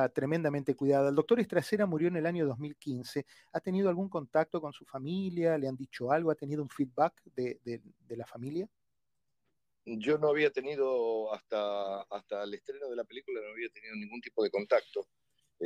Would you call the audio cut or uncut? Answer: uncut